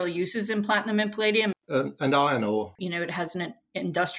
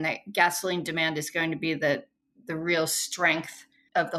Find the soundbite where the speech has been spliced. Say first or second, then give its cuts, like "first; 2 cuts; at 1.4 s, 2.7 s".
first; 2 cuts; at 1.5 s, 2.8 s